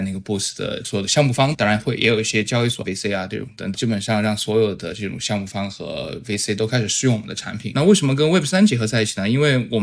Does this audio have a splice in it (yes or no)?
yes